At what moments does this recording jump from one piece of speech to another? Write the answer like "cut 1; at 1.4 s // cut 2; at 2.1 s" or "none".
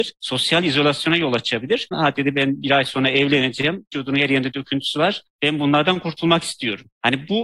cut 1; at 1.9 s

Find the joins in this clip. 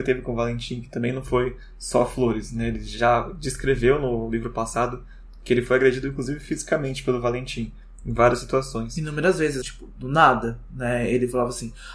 cut 1; at 9.6 s

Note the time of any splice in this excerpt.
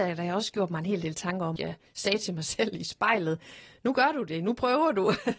cut 1; at 1.6 s

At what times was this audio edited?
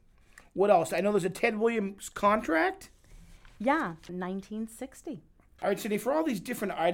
cut 1; at 4.1 s // cut 2; at 5.6 s

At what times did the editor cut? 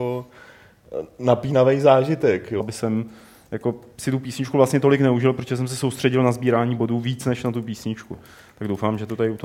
cut 1; at 2.6 s

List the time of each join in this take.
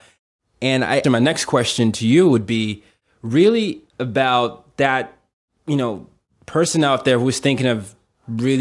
cut 1; at 1.0 s // cut 2; at 3.9 s

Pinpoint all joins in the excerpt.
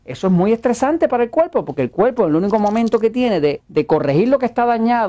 cut 1; at 3.6 s

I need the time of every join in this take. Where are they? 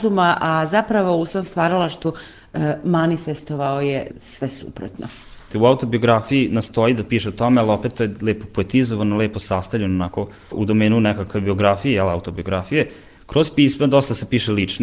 cut 1; at 5.5 s // cut 2; at 10.5 s

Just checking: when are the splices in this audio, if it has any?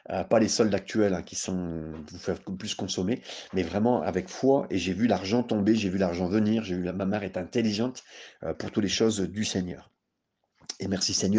cut 1; at 8.5 s

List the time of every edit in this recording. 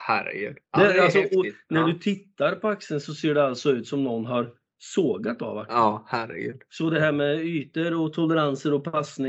cut 1; at 6.7 s

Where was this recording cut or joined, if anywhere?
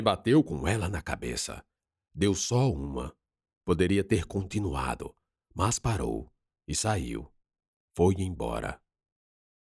none

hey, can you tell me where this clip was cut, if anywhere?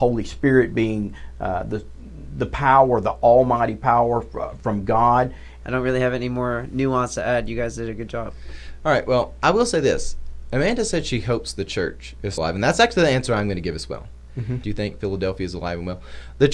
cut 1; at 5.6 s // cut 2; at 12.4 s // cut 3; at 14.6 s

